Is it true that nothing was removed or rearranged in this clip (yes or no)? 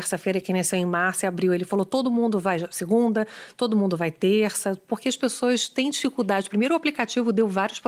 yes